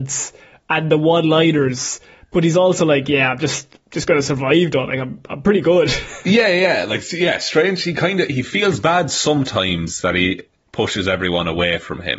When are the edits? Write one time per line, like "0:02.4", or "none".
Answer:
none